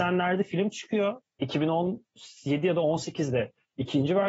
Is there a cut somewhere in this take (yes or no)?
no